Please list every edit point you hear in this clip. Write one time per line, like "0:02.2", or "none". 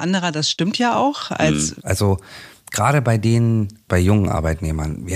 0:01.8
0:03.9